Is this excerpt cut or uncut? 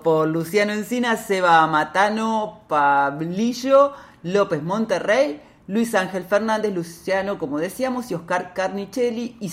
uncut